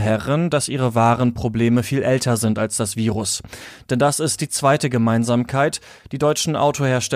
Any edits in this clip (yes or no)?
no